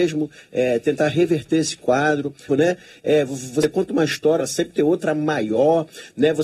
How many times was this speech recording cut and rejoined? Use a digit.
2